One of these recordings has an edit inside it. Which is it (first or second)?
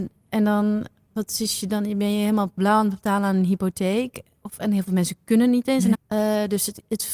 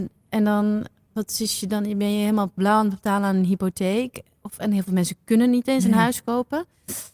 first